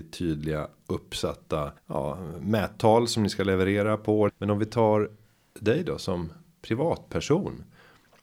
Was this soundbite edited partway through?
yes; 2 cuts; at 1.8 s, 4.3 s

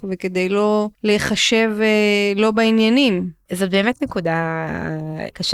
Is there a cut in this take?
yes; 1 cut; at 0.9 s

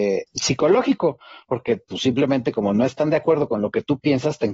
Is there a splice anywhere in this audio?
no; 0 cuts

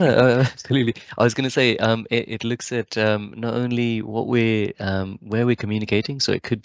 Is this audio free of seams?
yes; 0 cuts

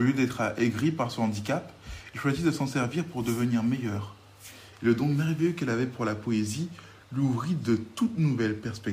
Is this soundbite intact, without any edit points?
yes; 0 cuts

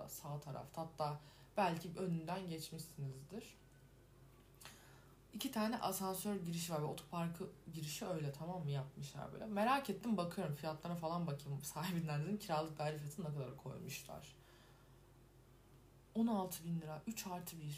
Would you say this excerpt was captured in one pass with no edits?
no; 1 cut; at 5.3 s

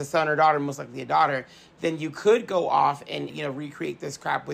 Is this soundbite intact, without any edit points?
no; 1 cut; at 3.3 s

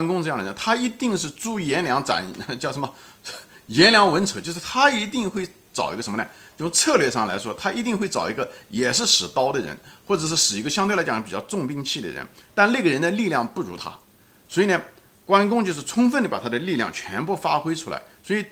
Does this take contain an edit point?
no; 0 cuts

